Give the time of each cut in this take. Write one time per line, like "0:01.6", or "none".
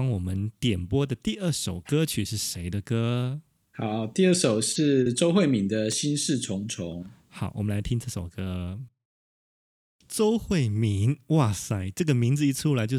none